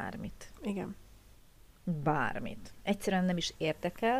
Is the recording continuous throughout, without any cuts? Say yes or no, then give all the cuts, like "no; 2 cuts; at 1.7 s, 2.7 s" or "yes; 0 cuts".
yes; 0 cuts